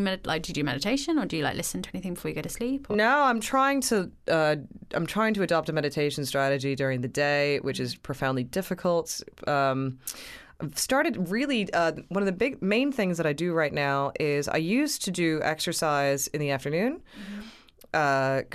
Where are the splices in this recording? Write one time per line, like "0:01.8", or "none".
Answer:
none